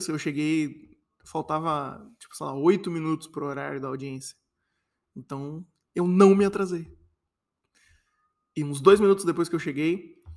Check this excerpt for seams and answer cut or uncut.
uncut